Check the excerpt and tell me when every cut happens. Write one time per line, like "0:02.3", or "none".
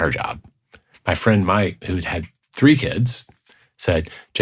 0:00.9